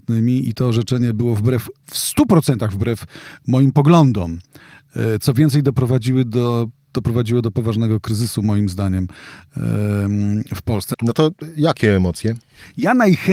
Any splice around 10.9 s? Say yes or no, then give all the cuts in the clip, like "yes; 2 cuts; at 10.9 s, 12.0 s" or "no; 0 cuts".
yes; 1 cut; at 10.9 s